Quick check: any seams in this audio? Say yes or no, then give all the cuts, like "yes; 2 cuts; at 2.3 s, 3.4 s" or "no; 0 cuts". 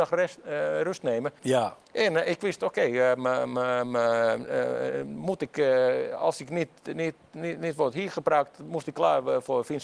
yes; 1 cut; at 1.4 s